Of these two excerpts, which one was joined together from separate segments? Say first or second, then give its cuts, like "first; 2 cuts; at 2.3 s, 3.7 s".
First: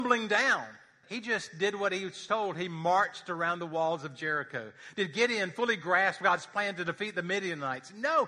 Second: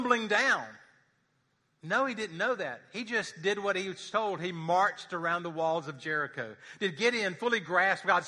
first; 1 cut; at 1.0 s